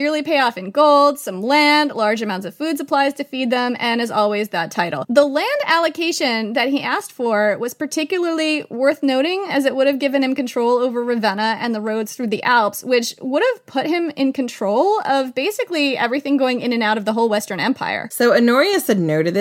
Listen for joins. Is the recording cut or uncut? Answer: uncut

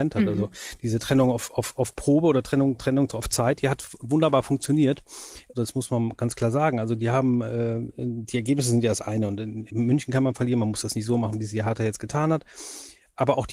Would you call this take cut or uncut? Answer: cut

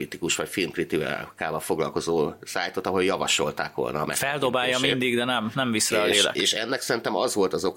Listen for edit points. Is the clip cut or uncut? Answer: cut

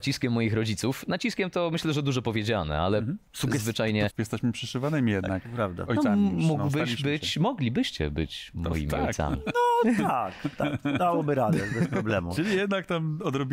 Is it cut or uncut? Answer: cut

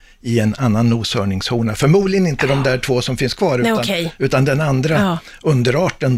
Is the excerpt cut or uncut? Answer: uncut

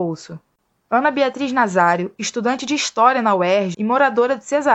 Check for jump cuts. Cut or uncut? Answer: cut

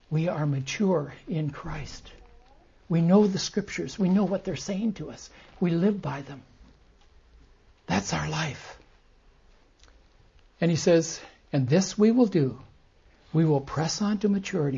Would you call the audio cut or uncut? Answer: uncut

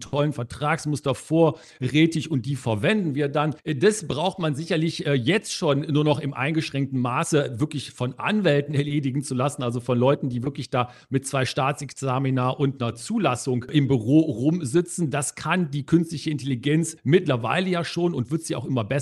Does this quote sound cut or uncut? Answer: uncut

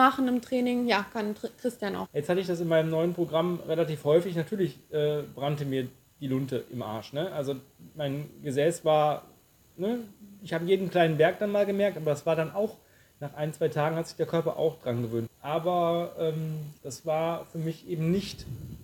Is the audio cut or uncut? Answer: cut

